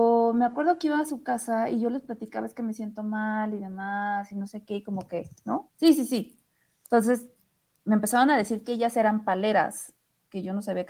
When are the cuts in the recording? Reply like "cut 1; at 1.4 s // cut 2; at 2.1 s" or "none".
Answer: cut 1; at 5.7 s